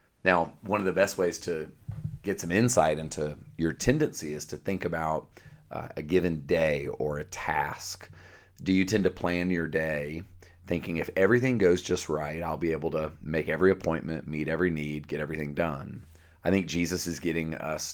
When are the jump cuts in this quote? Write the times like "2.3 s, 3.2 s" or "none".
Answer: 16.3 s